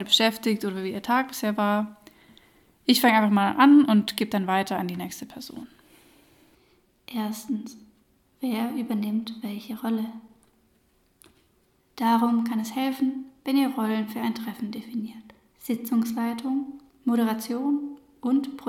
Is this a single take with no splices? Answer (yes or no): no